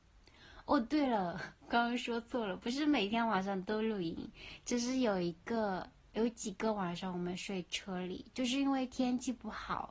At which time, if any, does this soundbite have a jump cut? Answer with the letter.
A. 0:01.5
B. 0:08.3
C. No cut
C